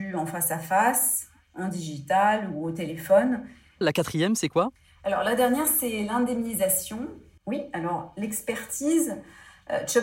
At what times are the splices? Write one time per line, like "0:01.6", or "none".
0:03.8
0:07.4